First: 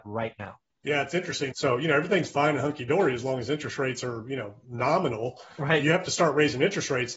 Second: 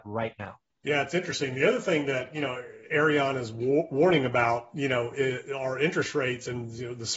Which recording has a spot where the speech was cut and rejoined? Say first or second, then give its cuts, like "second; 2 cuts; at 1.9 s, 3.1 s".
first; 1 cut; at 1.5 s